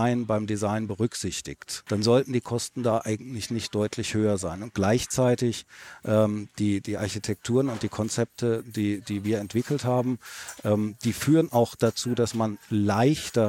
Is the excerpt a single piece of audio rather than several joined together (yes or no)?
no